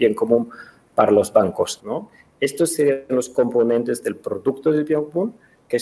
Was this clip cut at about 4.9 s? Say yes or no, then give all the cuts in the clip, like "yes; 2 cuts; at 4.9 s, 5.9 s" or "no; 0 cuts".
no; 1 cut; at 1.8 s